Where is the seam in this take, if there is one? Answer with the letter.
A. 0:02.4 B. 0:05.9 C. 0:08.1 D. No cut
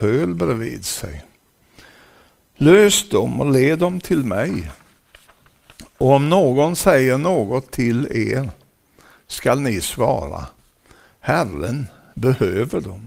D